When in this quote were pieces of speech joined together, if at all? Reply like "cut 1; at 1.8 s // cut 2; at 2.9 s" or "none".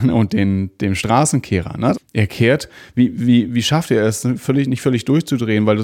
cut 1; at 1.9 s